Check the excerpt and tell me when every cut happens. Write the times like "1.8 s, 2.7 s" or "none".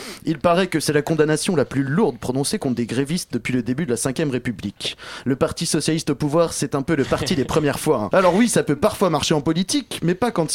8.1 s